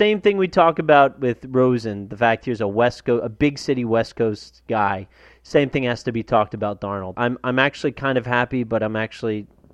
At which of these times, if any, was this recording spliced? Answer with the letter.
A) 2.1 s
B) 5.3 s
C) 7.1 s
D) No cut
C